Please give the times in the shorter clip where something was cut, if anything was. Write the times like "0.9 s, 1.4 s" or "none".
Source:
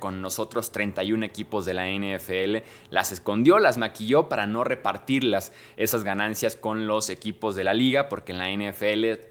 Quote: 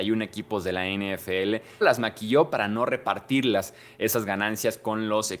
1.8 s